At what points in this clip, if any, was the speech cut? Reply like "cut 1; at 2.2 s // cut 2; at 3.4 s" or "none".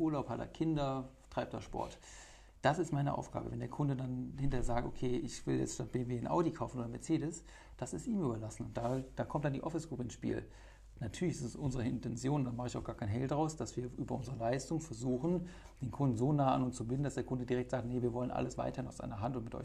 none